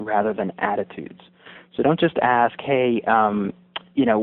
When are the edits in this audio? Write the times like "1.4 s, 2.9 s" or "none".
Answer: none